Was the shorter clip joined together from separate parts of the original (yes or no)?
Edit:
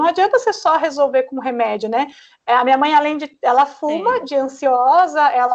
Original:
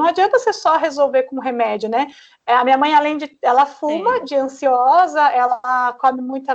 no